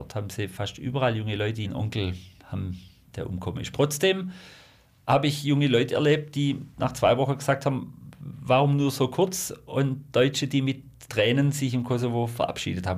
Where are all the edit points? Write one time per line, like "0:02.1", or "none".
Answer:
none